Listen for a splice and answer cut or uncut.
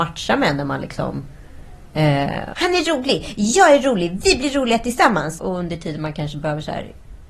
cut